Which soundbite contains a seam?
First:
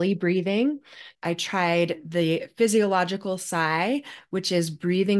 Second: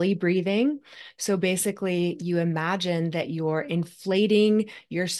first; 1 cut; at 1.1 s

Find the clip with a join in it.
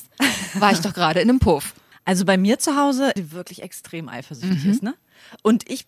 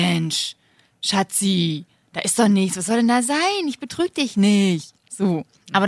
first; 2 cuts; at 1.9 s, 3.2 s

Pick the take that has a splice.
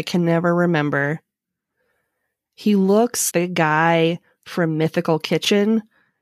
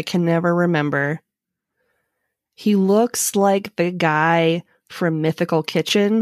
first; 1 cut; at 3.3 s

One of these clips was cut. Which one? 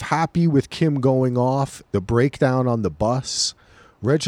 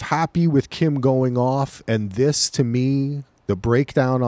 first; 1 cut; at 1.8 s

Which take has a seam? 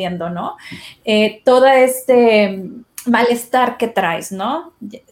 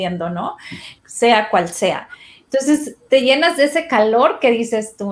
second; 1 cut; at 1.0 s

